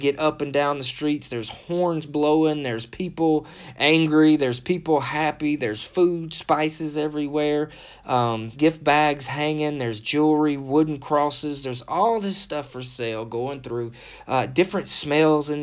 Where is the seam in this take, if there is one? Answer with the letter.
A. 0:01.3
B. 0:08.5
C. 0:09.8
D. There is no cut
B